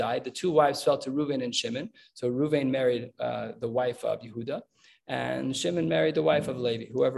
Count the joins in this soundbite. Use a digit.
0